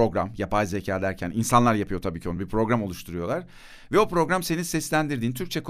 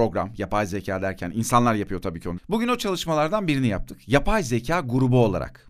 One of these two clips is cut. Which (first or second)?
second